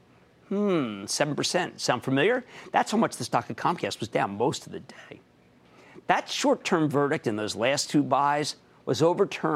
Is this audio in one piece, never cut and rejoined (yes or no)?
yes